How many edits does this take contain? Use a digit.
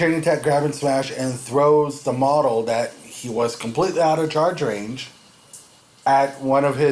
0